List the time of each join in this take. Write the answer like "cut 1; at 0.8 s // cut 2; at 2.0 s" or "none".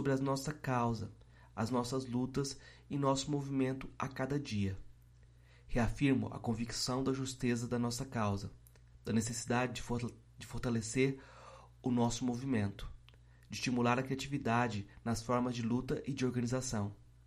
none